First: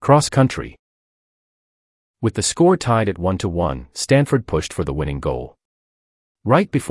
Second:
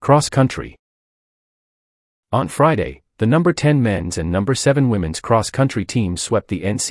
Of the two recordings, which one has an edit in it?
first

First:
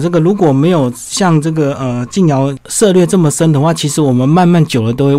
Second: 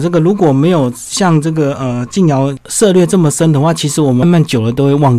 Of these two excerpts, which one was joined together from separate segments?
second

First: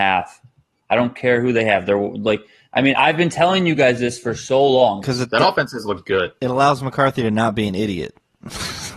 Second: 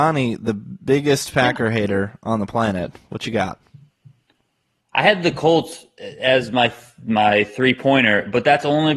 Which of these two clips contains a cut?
first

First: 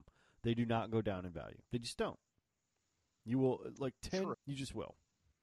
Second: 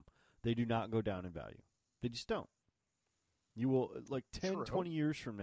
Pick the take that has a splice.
first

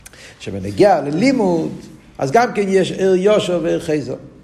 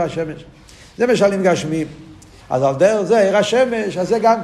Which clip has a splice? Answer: second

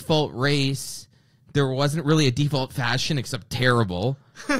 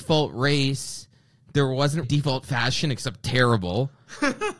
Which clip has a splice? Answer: second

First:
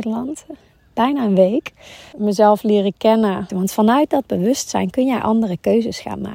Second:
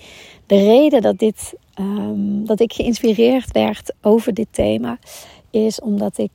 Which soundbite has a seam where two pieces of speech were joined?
first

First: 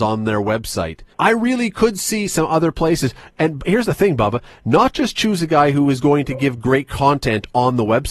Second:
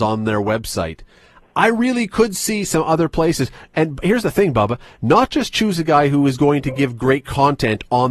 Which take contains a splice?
first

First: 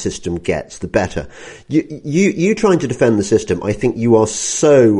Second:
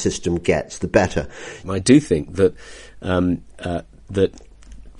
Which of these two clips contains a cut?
second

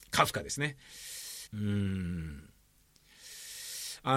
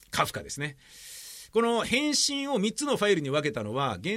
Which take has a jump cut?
first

